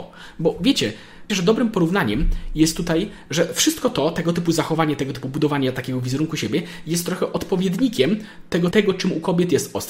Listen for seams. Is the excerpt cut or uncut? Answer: cut